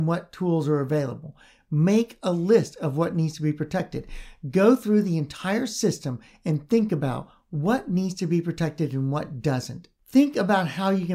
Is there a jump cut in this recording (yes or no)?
no